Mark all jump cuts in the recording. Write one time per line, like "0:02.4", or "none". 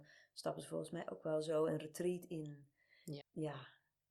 0:03.2